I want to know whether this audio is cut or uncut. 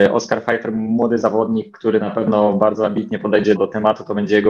cut